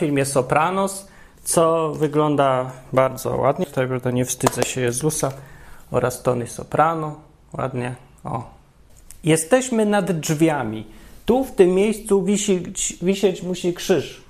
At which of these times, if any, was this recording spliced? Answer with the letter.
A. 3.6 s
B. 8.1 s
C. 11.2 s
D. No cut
A